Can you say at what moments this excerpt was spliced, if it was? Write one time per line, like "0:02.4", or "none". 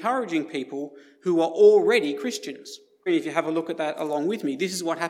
0:03.1